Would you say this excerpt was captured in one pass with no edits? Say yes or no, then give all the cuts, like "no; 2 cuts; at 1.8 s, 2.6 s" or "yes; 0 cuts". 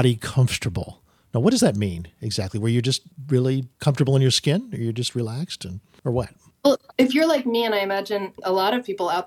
yes; 0 cuts